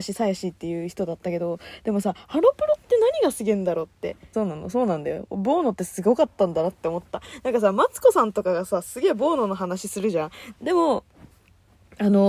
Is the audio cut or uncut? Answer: cut